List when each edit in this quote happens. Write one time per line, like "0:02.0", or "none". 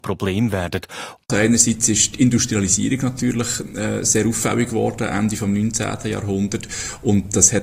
0:01.2